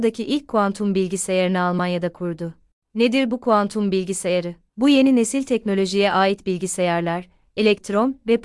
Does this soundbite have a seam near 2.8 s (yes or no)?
no